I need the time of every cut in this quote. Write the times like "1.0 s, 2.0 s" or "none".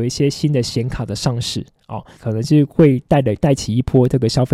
2.2 s